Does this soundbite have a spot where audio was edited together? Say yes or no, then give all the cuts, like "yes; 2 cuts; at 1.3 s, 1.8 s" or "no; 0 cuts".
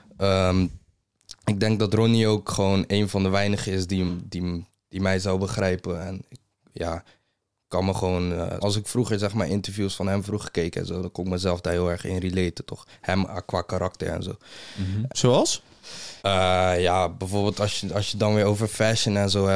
yes; 3 cuts; at 8.6 s, 15.1 s, 16.2 s